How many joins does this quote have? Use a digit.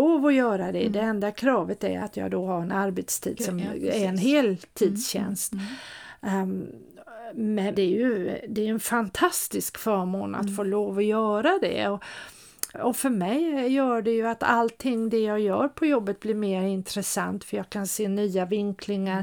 2